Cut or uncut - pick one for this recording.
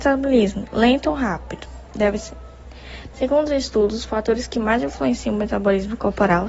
cut